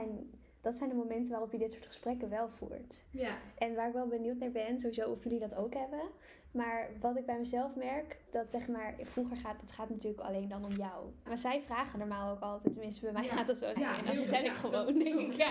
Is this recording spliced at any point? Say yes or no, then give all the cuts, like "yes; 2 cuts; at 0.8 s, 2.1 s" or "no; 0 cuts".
yes; 3 cuts; at 8.3 s, 11.3 s, 13.8 s